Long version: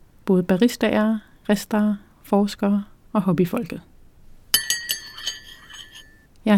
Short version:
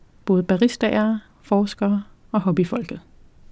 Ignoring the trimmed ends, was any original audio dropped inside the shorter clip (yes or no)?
yes